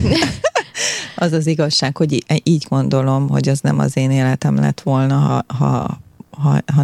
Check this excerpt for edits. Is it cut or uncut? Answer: uncut